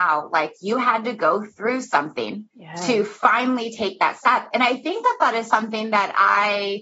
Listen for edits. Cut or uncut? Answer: cut